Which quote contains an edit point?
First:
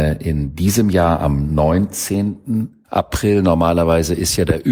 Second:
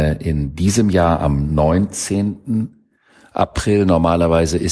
first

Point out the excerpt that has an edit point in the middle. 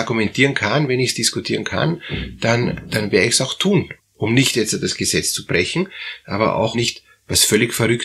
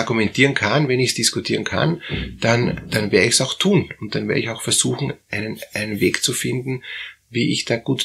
first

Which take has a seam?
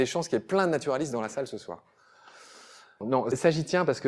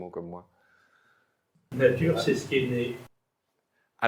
first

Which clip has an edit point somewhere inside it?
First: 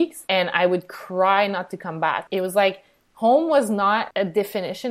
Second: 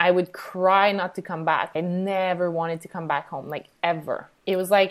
first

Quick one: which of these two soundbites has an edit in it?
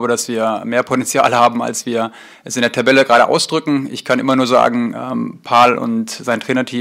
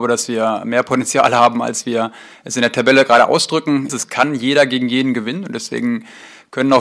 second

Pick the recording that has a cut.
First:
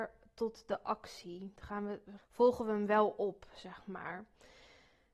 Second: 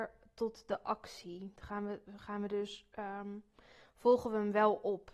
first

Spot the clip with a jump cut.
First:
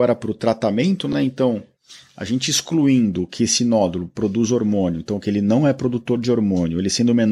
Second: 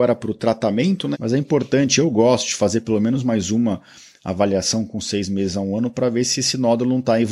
second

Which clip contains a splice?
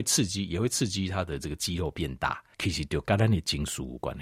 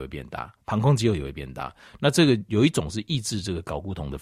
first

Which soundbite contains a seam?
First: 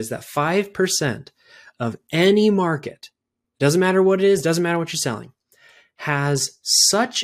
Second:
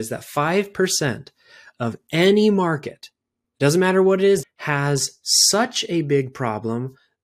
second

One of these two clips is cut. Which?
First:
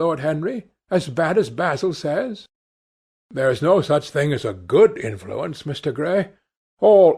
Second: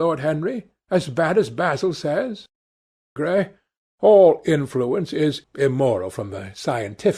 second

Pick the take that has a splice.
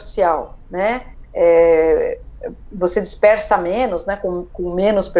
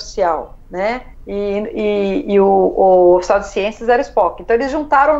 first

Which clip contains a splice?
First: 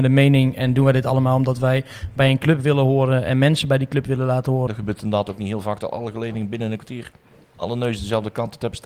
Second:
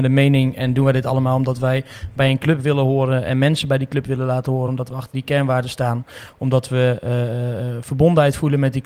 first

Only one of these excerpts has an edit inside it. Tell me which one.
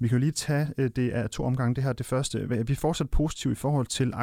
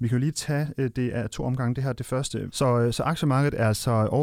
second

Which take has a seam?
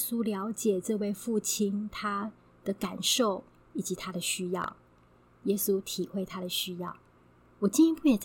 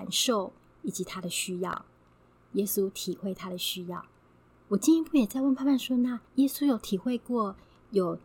second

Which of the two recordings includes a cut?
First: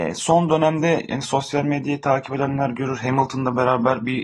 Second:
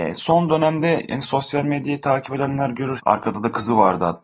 second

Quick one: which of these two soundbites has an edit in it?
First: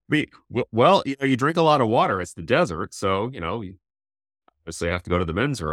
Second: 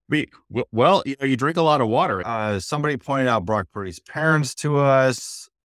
second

